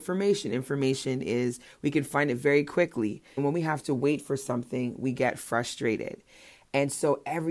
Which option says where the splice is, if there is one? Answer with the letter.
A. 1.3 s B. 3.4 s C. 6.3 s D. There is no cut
B